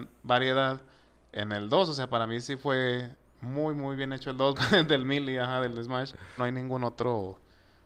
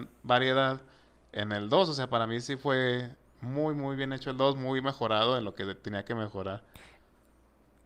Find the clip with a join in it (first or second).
first